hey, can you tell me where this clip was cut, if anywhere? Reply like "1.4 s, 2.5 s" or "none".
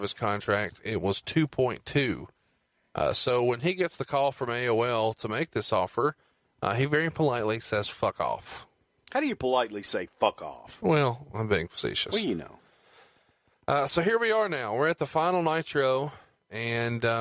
none